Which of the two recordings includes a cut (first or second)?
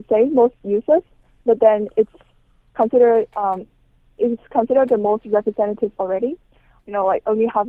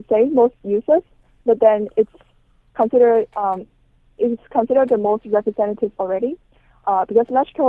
first